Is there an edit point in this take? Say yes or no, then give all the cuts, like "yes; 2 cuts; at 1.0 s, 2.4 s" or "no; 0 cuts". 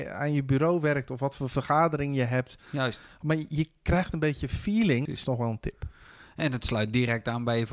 yes; 1 cut; at 5.0 s